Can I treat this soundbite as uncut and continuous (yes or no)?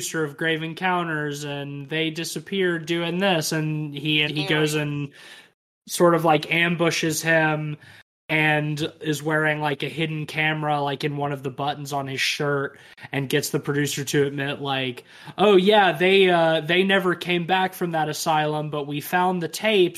no